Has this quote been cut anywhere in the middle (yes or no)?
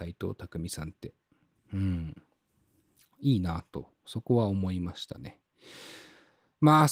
no